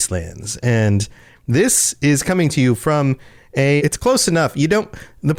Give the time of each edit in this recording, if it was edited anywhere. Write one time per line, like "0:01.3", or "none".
0:03.8